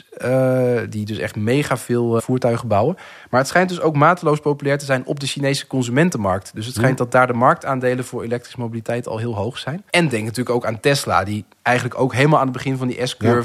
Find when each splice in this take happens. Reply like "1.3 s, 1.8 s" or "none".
2.2 s, 9.9 s